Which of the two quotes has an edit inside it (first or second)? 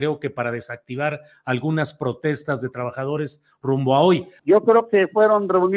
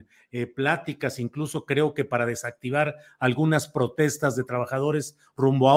first